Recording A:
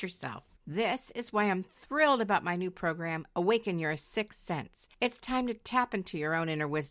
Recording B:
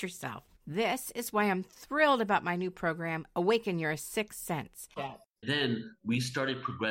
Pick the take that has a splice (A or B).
B